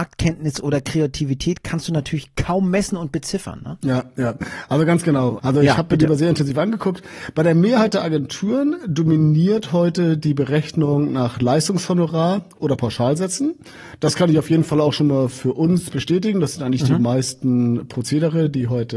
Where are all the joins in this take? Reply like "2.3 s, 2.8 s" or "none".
5.4 s